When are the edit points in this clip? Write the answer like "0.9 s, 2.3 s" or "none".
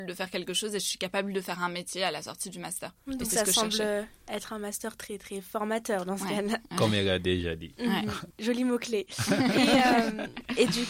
none